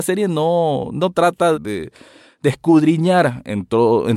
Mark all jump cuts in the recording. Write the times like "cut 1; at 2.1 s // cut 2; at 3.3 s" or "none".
cut 1; at 1.5 s